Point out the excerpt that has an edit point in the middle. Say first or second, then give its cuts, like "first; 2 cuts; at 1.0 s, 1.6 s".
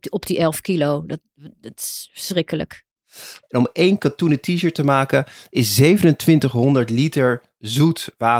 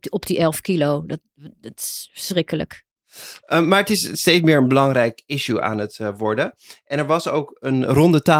first; 1 cut; at 3.4 s